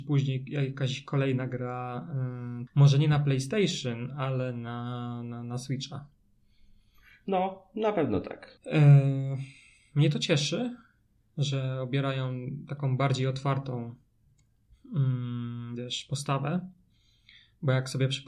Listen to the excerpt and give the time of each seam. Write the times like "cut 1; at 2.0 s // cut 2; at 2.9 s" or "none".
cut 1; at 2.7 s // cut 2; at 8.6 s